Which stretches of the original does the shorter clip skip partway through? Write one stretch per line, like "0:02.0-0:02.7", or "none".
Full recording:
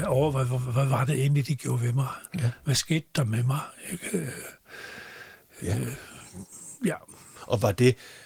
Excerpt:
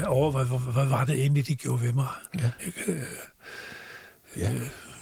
0:02.6-0:03.8